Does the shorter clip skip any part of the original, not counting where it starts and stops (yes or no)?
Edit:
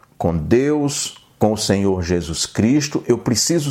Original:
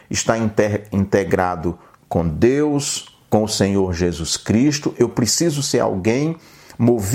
no